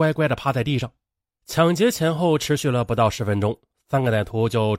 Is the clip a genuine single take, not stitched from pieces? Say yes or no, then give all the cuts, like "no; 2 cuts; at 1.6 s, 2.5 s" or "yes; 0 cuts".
no; 1 cut; at 1.4 s